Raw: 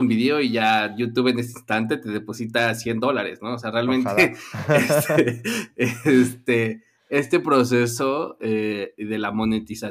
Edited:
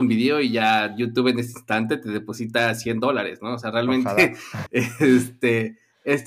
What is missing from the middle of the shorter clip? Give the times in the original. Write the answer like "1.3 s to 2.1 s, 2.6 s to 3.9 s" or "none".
4.7 s to 5.7 s